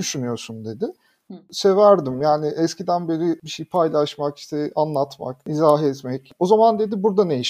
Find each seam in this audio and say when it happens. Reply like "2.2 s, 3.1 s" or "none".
1.3 s, 6.3 s